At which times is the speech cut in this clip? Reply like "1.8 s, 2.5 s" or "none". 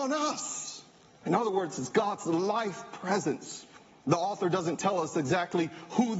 1.2 s, 4.0 s